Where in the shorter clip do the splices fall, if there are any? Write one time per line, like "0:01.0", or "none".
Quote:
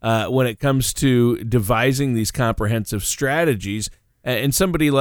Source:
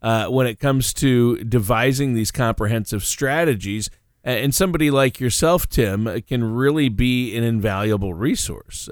none